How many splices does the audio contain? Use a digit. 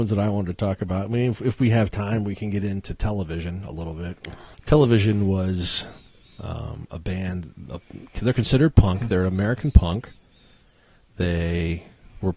1